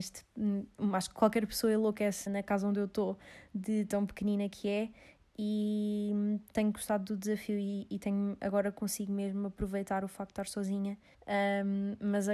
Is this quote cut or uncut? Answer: cut